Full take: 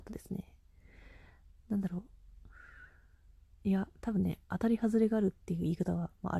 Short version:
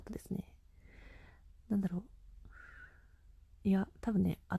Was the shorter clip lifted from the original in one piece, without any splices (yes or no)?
yes